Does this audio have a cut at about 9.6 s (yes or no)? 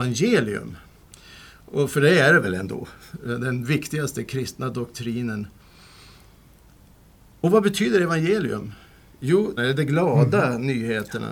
yes